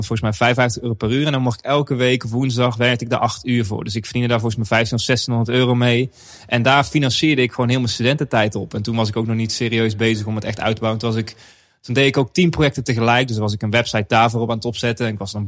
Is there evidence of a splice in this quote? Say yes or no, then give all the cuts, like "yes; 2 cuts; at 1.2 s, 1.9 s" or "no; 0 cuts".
no; 0 cuts